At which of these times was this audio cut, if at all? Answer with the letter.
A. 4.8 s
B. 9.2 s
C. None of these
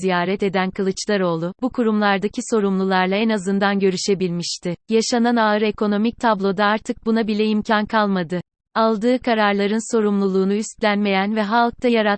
A